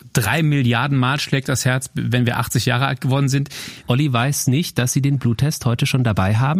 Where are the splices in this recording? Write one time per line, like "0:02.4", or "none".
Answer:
0:03.8